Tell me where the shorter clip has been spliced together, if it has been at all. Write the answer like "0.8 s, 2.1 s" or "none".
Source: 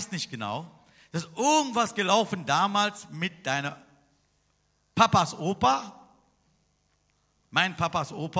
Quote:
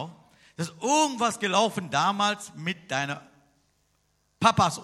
none